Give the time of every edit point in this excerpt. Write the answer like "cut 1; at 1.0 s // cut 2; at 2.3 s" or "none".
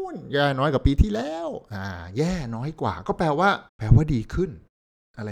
cut 1; at 3.7 s

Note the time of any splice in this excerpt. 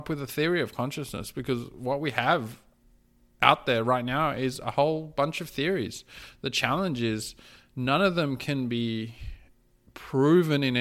none

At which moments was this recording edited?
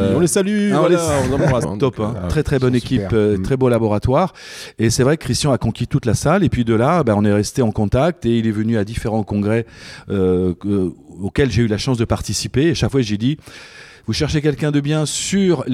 cut 1; at 1.6 s

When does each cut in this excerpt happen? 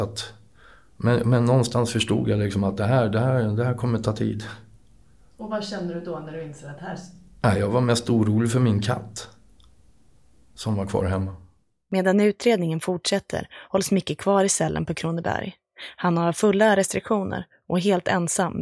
none

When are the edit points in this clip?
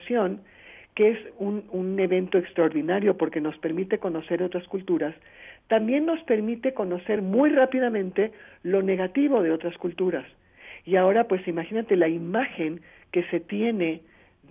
none

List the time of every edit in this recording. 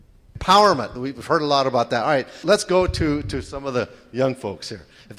none

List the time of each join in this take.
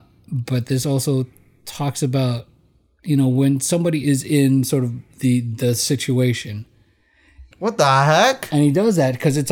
cut 1; at 7.5 s

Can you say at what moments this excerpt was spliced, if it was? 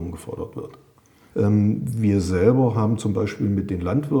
cut 1; at 1.3 s

